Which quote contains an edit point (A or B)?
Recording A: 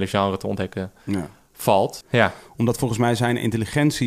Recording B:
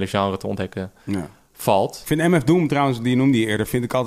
A